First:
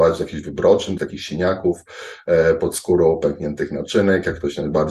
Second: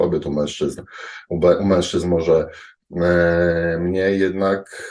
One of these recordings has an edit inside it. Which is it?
first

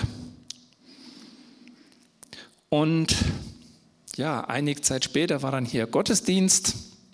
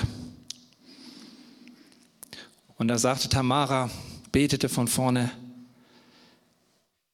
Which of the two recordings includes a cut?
second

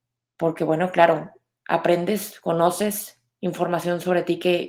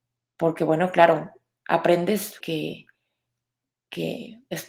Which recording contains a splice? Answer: second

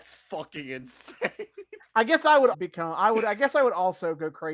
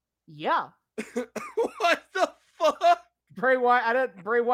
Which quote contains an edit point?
first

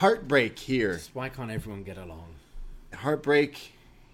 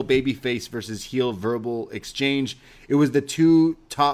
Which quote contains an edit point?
first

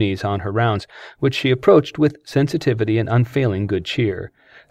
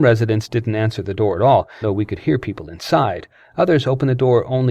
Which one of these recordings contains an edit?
second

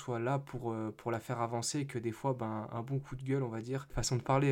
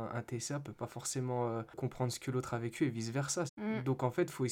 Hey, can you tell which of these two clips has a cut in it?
second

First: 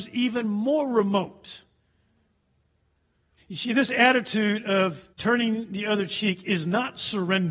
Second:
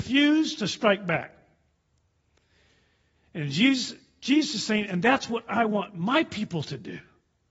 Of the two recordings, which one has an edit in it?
first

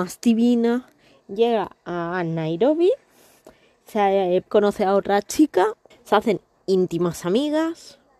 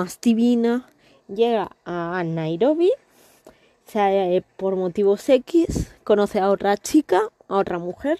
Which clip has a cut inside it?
first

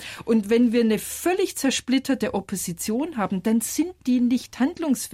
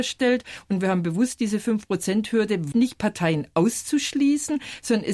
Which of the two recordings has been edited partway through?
second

